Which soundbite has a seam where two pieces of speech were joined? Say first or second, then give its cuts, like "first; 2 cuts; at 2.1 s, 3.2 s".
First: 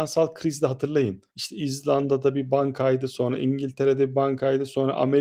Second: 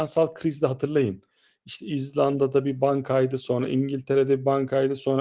first; 1 cut; at 1.3 s